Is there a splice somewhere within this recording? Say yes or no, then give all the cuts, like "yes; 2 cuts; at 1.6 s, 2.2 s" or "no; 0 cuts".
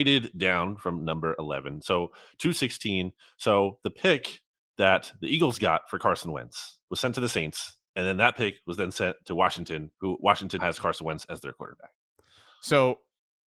yes; 2 cuts; at 6.8 s, 10.6 s